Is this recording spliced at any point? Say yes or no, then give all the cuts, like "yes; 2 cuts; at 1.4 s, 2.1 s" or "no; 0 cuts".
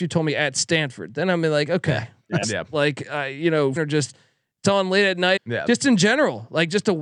yes; 3 cuts; at 2.4 s, 3.8 s, 5.4 s